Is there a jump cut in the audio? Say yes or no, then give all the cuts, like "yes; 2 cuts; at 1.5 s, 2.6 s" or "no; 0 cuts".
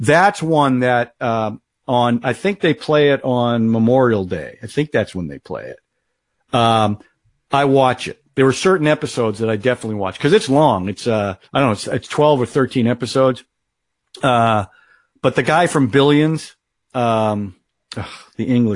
yes; 1 cut; at 11.5 s